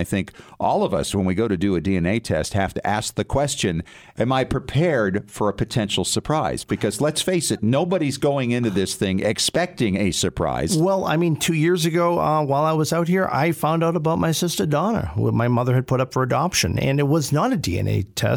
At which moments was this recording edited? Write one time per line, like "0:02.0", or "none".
none